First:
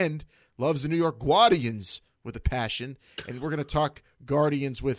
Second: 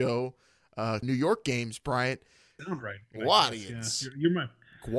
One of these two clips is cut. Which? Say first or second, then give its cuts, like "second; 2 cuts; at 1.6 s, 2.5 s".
second; 2 cuts; at 1.0 s, 2.6 s